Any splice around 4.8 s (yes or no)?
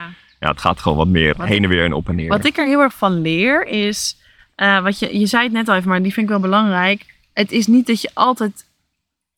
no